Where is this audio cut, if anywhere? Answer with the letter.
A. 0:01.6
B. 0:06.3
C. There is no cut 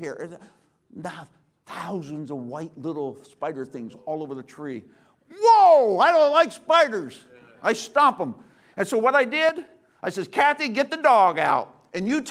C